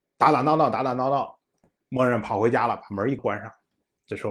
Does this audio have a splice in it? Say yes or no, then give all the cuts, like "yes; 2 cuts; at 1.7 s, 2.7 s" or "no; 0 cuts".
yes; 1 cut; at 3.2 s